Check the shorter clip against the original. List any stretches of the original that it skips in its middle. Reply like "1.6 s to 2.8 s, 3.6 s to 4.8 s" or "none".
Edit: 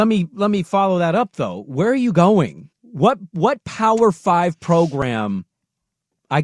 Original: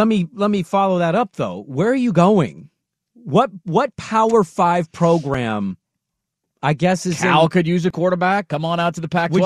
2.7 s to 3.0 s